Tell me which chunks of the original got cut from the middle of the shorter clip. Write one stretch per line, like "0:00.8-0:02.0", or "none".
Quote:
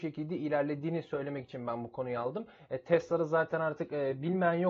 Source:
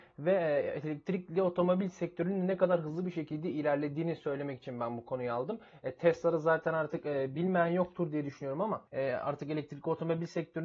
none

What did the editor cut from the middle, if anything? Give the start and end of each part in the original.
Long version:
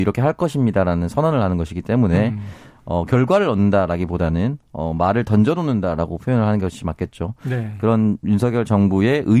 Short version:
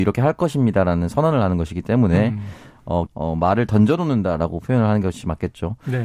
0:03.1-0:04.6

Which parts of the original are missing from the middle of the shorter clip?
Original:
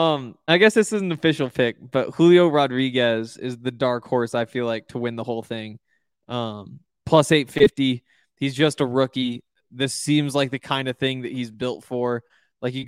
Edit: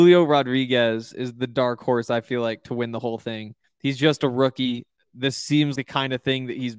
0:05.9-0:08.2
0:10.3-0:10.5

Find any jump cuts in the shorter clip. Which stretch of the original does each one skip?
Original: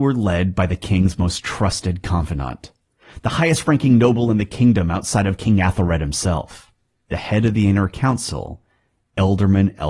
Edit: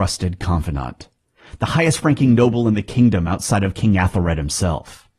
none

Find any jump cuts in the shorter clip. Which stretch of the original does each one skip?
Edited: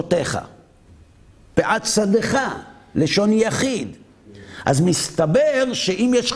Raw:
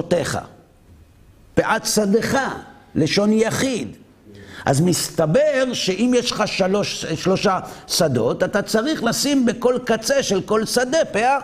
none

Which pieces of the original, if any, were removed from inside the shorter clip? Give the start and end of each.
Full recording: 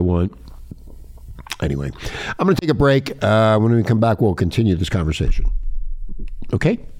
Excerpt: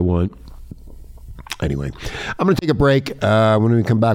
none

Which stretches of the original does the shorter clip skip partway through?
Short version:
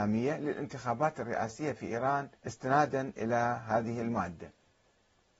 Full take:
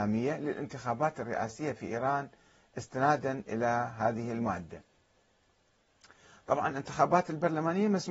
0:02.4-0:02.7

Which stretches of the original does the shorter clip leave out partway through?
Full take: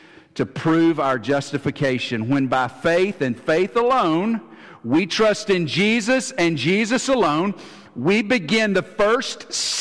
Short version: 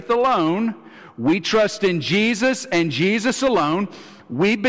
none

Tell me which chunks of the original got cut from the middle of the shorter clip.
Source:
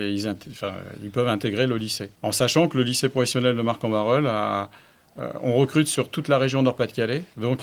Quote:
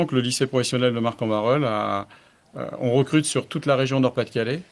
none

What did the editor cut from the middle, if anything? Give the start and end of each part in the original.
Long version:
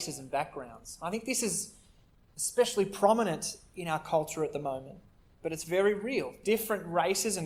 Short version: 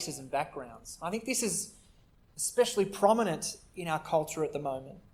none

